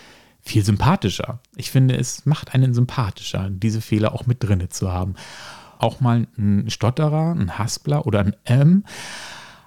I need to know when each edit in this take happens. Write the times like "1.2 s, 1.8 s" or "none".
5.8 s